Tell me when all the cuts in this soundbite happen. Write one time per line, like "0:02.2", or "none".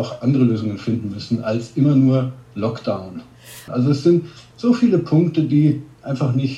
0:03.7